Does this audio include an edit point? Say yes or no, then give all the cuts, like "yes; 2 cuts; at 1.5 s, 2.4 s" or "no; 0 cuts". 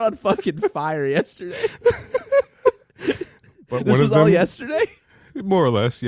no; 0 cuts